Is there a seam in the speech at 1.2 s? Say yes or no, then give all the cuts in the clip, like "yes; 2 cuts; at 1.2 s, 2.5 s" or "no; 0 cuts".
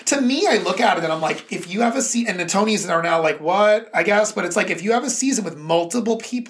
no; 0 cuts